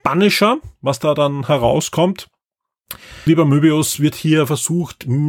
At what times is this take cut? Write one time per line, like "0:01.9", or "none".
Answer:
0:03.3